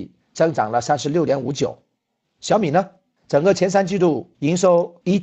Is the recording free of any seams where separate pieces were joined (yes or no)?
yes